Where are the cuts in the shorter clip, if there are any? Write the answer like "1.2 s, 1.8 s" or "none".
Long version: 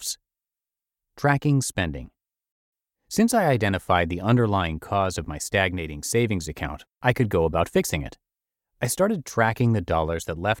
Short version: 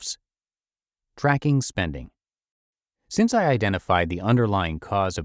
none